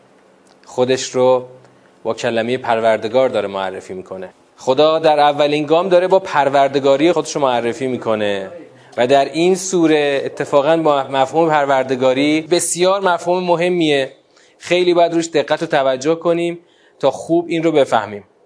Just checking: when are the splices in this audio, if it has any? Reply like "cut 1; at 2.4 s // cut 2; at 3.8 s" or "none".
cut 1; at 7.1 s